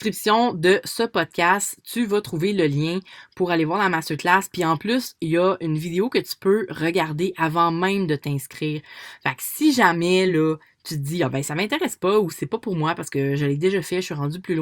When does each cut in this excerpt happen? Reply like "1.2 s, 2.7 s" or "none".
none